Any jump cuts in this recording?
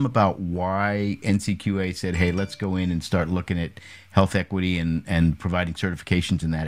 no; 0 cuts

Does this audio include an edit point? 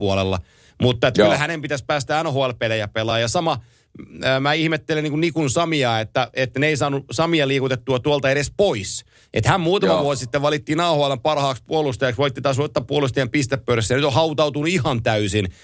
no; 0 cuts

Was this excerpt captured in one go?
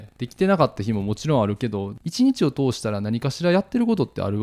yes; 0 cuts

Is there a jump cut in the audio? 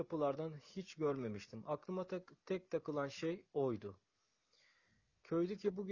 no; 0 cuts

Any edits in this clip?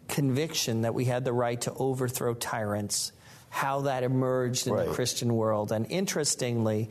no; 0 cuts

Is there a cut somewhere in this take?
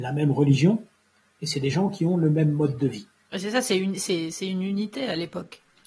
no; 0 cuts

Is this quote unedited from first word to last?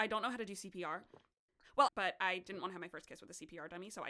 no; 1 cut; at 1.9 s

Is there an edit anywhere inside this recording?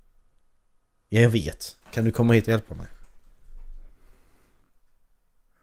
no; 0 cuts

